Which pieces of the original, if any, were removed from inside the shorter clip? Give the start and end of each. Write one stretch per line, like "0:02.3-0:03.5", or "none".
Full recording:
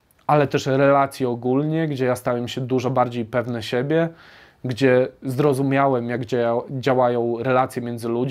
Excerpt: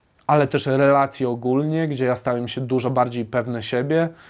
none